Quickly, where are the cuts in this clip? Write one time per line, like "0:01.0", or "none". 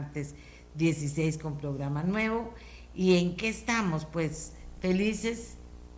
none